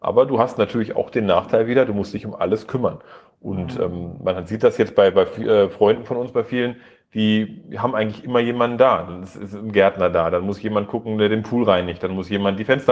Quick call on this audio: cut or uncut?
uncut